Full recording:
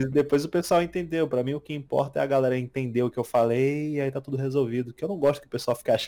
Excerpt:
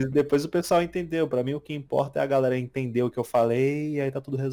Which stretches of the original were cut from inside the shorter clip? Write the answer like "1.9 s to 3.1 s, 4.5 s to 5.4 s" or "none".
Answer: none